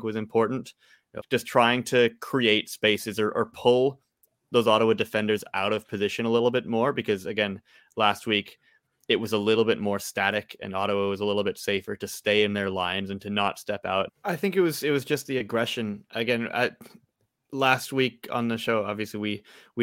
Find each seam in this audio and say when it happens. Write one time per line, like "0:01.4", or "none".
0:01.2
0:14.1